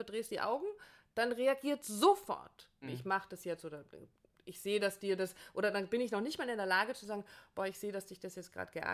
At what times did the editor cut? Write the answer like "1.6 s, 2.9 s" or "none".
2.8 s

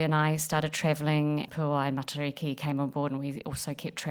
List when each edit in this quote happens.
1.5 s

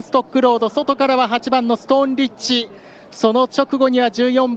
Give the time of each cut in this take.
none

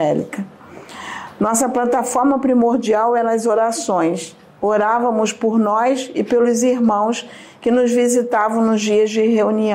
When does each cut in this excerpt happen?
none

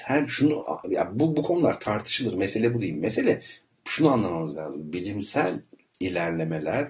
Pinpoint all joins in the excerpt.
none

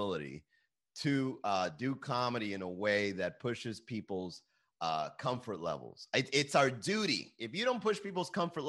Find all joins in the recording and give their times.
none

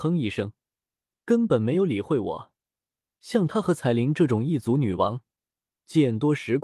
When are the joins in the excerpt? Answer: none

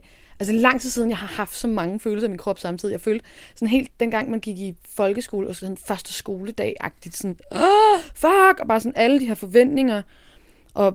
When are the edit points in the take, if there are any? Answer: none

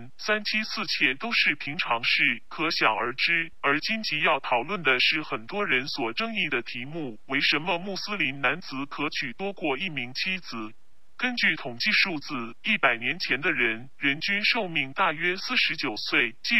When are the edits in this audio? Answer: 3.5 s

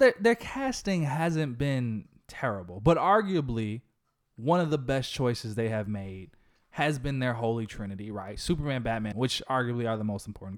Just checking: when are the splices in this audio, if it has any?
9.1 s

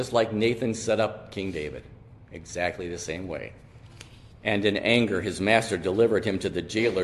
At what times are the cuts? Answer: 4.4 s

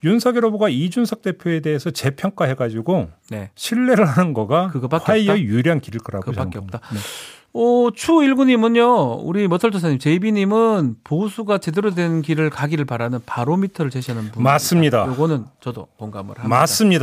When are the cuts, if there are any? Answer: none

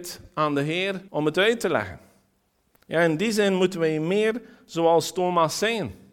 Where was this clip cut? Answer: 1.1 s

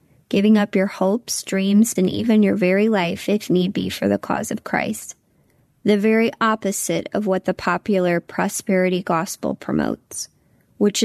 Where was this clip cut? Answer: 2.0 s

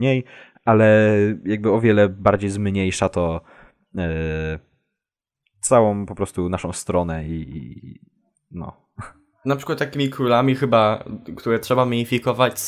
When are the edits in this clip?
none

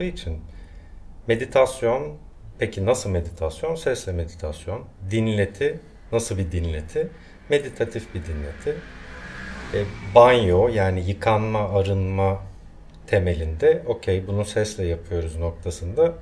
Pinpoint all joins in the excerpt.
none

